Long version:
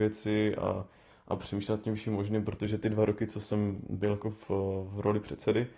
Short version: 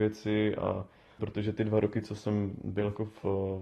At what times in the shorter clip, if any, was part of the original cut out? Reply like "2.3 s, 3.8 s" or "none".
1.2 s